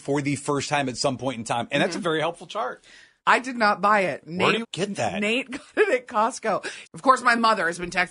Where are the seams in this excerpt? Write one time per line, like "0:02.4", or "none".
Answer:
0:03.2
0:04.6
0:06.8